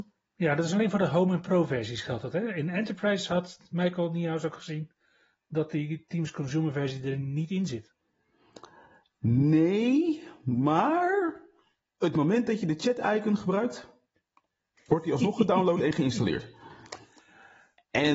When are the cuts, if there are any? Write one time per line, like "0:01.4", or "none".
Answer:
none